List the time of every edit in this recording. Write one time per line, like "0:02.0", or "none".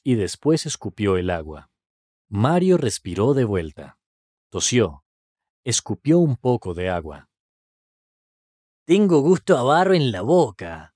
0:02.1

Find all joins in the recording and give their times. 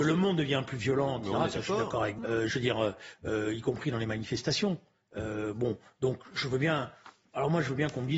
0:02.2

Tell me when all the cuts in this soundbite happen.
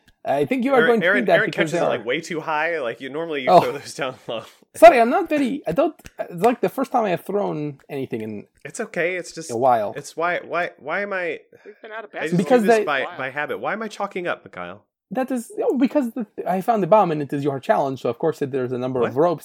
none

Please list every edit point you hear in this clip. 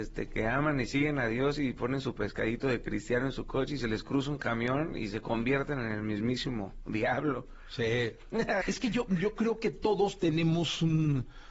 0:08.6

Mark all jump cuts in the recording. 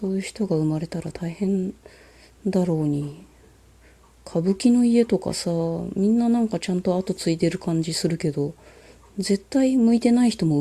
none

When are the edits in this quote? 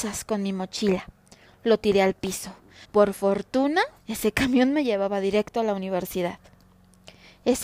0:02.8
0:04.0

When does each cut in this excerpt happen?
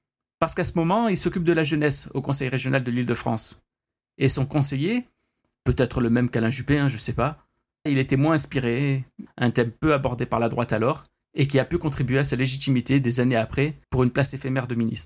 0:07.9
0:09.3
0:13.8

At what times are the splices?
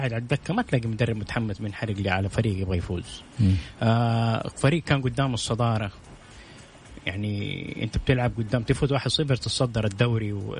none

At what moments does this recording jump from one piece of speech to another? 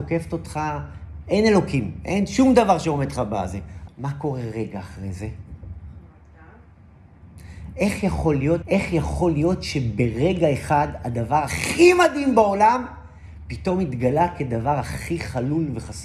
0:03.9
0:08.6

